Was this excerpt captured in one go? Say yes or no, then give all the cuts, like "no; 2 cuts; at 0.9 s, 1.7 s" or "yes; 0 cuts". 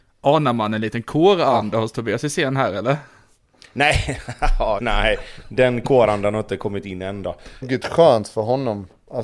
no; 2 cuts; at 4.8 s, 7.6 s